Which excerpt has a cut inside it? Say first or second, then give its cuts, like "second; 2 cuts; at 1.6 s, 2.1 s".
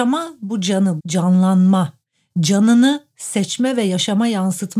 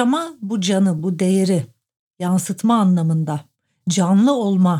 first; 1 cut; at 1.0 s